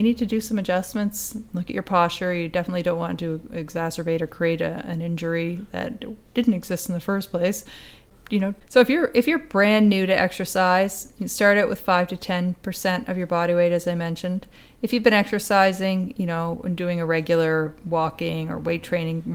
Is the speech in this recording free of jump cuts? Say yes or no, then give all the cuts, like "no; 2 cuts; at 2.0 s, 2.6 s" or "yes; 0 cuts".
no; 1 cut; at 8.6 s